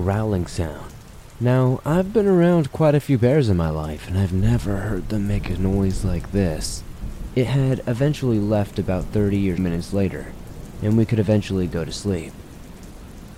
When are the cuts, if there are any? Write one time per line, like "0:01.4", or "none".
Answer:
0:07.3
0:09.6